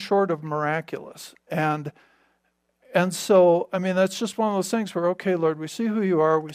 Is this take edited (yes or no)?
no